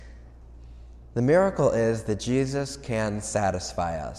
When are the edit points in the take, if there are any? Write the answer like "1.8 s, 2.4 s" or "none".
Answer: none